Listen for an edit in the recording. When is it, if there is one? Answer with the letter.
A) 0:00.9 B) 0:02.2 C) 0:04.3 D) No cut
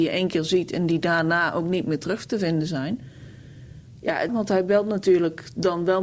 C